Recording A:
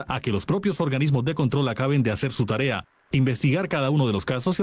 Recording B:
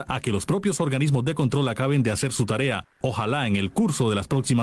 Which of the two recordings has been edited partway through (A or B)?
B